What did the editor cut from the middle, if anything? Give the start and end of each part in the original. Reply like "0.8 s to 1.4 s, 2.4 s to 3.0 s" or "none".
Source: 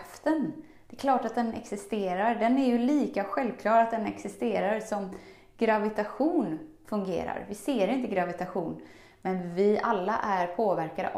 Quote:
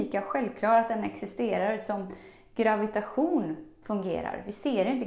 none